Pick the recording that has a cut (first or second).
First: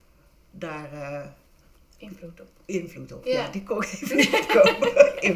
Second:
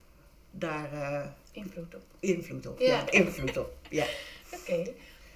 second